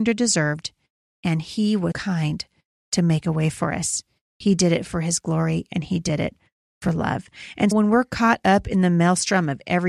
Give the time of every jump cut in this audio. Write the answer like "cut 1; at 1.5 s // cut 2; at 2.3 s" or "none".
cut 1; at 1.9 s // cut 2; at 7.7 s